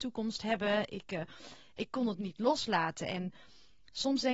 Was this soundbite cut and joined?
no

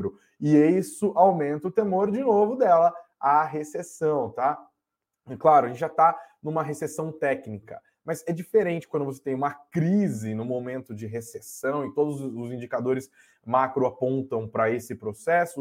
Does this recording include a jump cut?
no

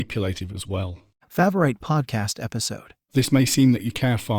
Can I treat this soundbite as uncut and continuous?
no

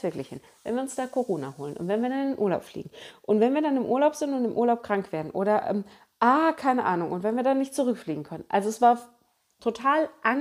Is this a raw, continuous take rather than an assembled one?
yes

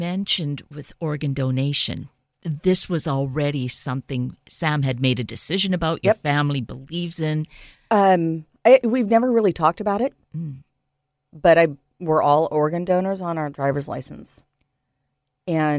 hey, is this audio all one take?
yes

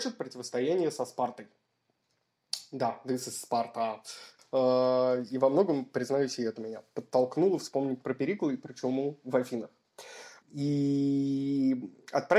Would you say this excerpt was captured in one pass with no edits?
no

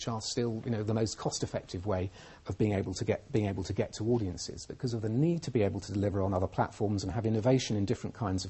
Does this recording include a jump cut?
no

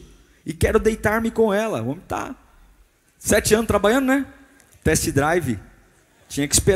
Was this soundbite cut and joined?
yes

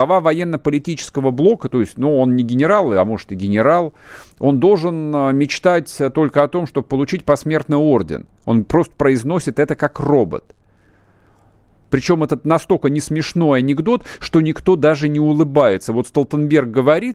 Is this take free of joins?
no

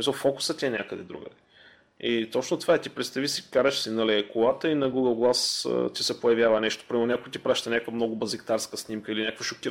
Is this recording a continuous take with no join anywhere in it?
yes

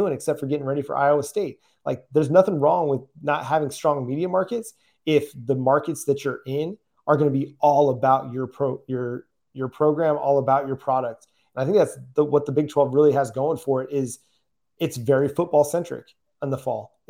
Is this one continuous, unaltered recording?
yes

